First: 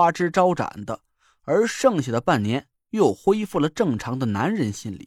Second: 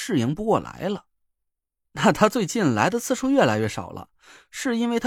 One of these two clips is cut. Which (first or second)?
second